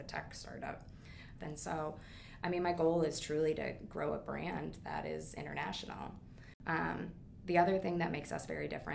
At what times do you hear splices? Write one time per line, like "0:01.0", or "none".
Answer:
0:01.4